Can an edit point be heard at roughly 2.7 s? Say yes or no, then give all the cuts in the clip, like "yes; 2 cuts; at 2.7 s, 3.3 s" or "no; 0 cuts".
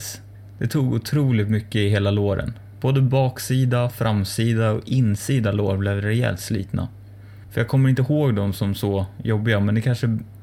no; 1 cut; at 7.5 s